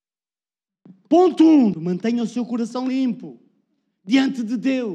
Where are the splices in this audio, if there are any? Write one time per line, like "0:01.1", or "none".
0:01.7